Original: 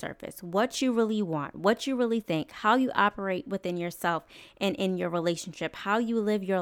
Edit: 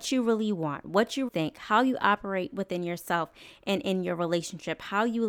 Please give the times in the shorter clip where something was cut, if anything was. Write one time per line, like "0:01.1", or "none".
0:01.3